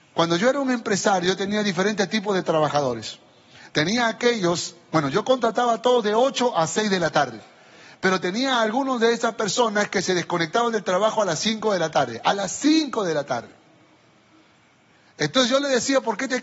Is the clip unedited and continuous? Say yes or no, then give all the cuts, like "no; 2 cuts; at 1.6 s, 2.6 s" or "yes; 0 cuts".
yes; 0 cuts